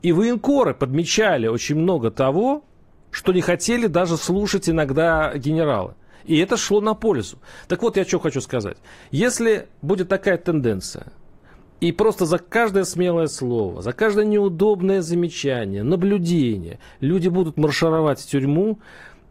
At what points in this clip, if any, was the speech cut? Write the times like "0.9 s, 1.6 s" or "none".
none

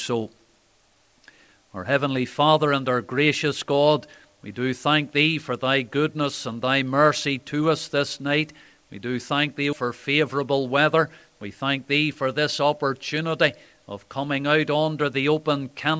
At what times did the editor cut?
9.7 s

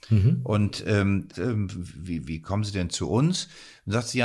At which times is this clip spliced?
1.3 s

